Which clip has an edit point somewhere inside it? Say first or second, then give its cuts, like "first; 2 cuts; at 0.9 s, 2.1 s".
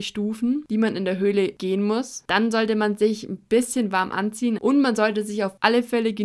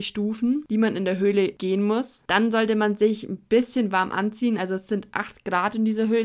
first; 1 cut; at 4.6 s